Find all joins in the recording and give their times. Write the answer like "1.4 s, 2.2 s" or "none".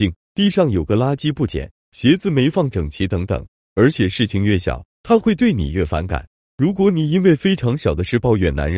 3.7 s, 6.4 s